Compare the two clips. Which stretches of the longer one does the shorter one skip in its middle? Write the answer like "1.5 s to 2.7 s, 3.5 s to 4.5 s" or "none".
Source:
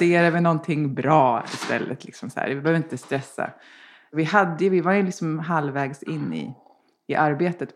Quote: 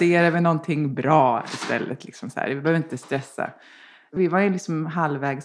4.2 s to 4.7 s